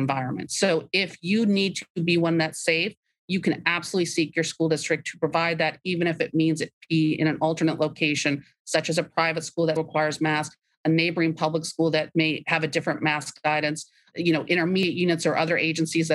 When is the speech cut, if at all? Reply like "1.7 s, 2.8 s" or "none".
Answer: 9.8 s